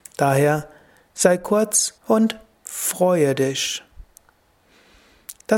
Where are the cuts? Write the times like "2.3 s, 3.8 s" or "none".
2.0 s